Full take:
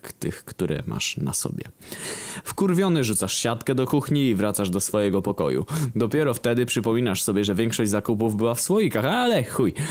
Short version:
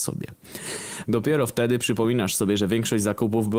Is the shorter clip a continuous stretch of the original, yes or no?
no